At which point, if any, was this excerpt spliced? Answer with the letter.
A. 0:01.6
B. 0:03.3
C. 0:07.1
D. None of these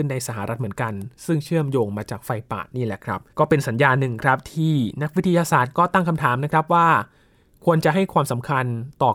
B